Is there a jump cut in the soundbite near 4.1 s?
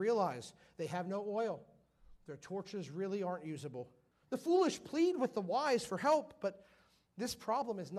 yes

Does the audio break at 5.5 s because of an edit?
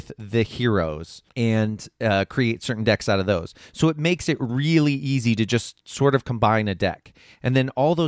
no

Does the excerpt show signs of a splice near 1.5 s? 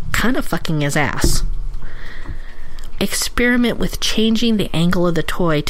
no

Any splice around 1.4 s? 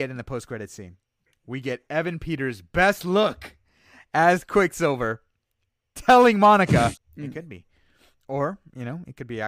no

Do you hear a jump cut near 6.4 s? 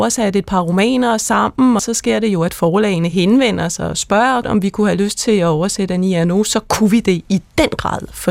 no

